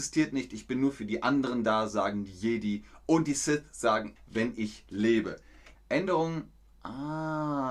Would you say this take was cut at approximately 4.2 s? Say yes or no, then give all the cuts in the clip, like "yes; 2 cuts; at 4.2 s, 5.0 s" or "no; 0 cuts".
yes; 2 cuts; at 4.2 s, 5.7 s